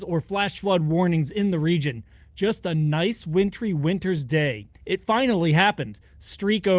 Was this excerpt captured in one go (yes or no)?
no